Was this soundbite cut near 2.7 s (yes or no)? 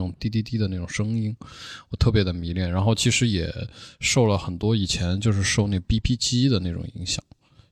no